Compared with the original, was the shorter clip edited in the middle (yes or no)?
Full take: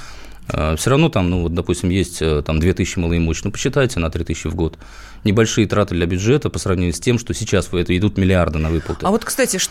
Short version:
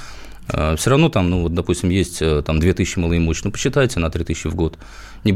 no